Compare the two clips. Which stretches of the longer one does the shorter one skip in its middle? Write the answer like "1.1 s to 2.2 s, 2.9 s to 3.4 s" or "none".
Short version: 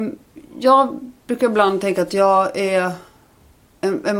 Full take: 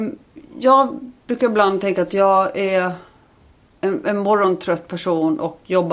none

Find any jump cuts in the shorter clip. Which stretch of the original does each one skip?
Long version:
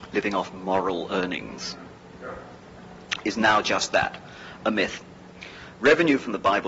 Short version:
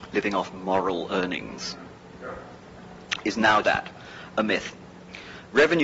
3.6 s to 3.9 s

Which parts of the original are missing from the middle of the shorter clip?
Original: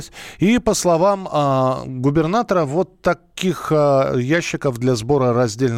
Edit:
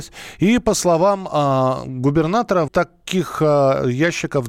2.7 s to 3.0 s

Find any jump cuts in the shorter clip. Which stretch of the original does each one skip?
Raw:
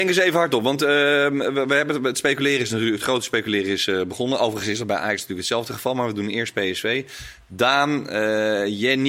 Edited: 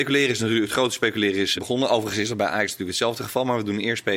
3.9 s to 4.0 s

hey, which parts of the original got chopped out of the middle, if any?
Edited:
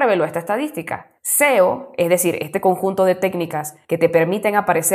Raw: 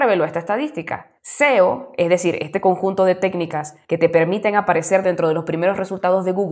none

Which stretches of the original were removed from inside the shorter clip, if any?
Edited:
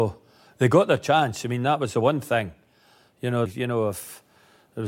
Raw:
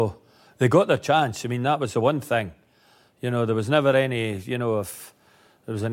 3.5 s to 4.4 s

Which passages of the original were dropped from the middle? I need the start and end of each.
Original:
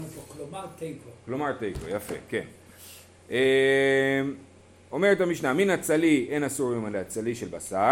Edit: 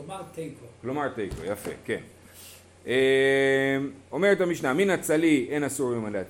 4.5 s to 4.8 s

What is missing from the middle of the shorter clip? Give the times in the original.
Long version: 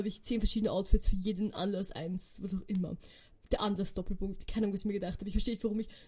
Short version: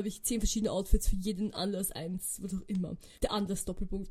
3.1 s to 3.4 s

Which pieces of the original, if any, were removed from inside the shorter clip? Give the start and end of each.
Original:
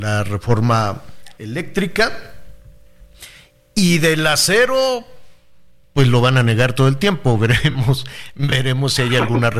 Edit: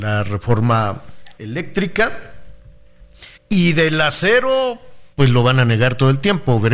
3.4 s to 3.6 s, 5.4 s to 5.9 s

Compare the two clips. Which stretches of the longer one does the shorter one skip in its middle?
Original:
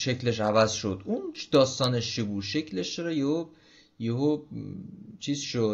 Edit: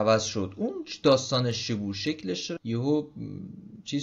3.0 s to 3.9 s

